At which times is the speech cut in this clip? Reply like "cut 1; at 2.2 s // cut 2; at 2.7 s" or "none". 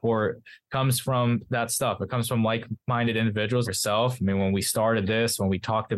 cut 1; at 3.6 s

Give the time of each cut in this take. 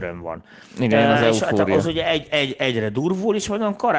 cut 1; at 2.3 s

